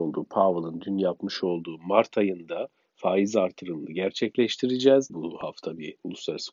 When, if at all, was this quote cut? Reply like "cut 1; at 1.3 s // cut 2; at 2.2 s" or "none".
cut 1; at 5.1 s